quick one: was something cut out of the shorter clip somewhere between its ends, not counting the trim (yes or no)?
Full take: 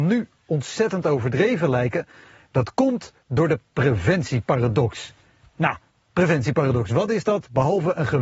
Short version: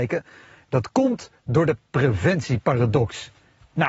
no